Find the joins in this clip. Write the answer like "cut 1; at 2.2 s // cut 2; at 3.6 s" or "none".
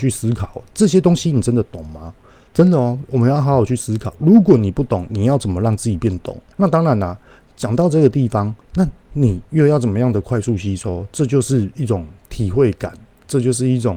cut 1; at 2.5 s // cut 2; at 6.5 s // cut 3; at 8.6 s